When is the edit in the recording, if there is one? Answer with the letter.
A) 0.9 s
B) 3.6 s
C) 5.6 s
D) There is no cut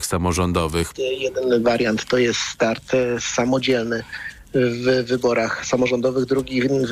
A